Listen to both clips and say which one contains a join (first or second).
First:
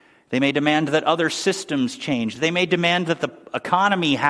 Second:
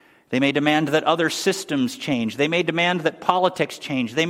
first